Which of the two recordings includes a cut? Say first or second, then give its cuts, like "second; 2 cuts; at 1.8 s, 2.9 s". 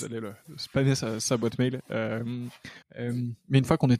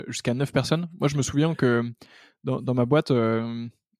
first; 1 cut; at 2.8 s